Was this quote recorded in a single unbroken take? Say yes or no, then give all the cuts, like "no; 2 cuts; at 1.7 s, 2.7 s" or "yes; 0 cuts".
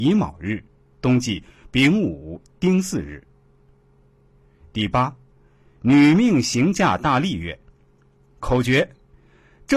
yes; 0 cuts